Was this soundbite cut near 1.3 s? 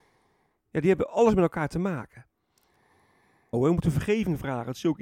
no; 1 cut; at 3.5 s

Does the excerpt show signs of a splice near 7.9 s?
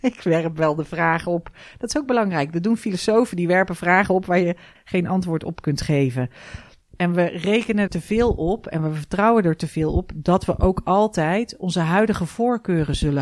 yes; 3 cuts; at 4.7 s, 6.8 s, 7.9 s

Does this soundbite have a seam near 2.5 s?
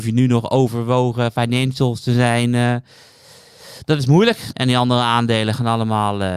no; 1 cut; at 4.5 s

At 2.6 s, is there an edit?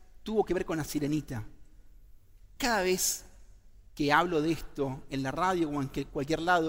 yes; 1 cut; at 2.6 s

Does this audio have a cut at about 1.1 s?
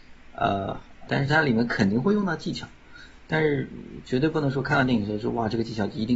yes; 1 cut; at 1.1 s

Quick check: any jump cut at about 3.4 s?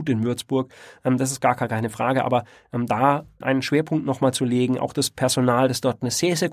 yes; 1 cut; at 3.4 s

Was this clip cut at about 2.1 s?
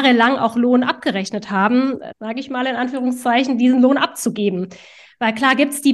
yes; 1 cut; at 2.1 s

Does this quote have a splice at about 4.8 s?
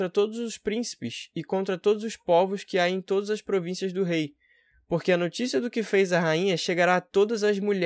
no; 0 cuts

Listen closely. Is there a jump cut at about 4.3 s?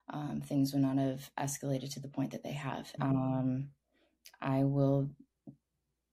no; 1 cut; at 3.0 s

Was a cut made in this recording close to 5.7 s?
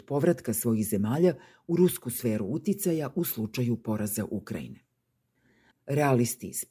yes; 1 cut; at 5.7 s

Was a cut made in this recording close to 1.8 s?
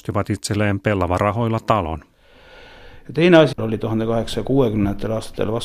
no; 1 cut; at 3.5 s

